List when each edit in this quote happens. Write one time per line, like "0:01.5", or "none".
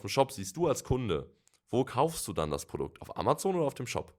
none